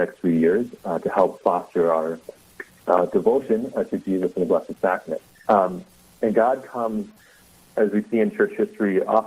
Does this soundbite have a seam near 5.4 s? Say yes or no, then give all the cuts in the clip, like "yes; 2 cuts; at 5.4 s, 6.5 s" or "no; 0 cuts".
yes; 1 cut; at 5.4 s